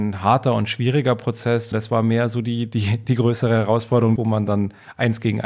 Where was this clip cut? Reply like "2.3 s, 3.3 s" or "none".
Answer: 1.7 s, 4.2 s